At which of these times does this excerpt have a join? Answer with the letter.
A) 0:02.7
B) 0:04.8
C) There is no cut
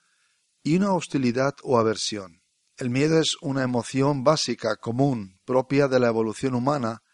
A